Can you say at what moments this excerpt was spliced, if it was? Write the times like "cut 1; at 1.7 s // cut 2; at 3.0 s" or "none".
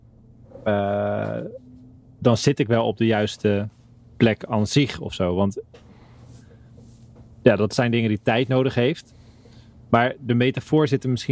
none